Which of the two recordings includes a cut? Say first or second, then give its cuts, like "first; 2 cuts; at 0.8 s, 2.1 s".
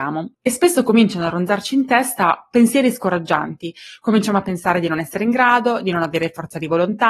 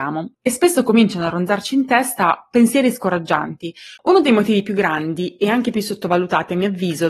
second; 1 cut; at 4.0 s